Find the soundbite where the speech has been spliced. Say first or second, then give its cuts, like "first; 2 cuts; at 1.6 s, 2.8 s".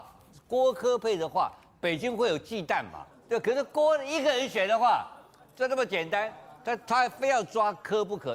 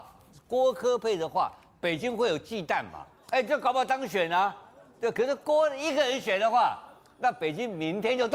first; 2 cuts; at 3.1 s, 5.4 s